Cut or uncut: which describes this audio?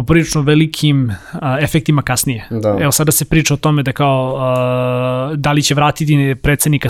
uncut